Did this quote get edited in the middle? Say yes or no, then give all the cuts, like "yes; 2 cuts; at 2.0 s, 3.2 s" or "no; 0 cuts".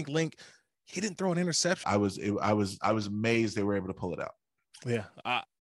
yes; 1 cut; at 1.8 s